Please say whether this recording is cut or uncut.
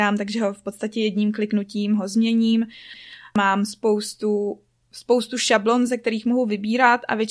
uncut